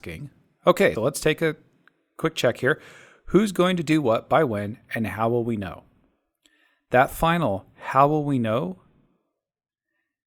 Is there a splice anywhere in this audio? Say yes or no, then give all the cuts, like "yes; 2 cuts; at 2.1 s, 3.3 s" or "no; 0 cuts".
yes; 1 cut; at 1.0 s